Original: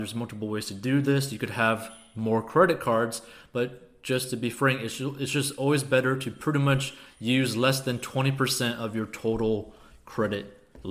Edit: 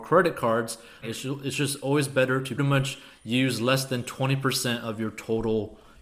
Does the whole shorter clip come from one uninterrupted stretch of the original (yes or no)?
no